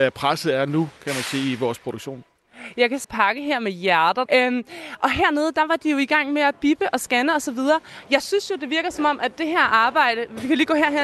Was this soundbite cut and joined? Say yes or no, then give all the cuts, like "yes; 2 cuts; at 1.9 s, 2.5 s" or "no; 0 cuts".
yes; 2 cuts; at 3.0 s, 4.3 s